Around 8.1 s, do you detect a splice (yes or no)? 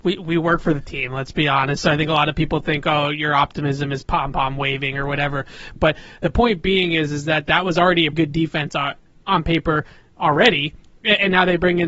yes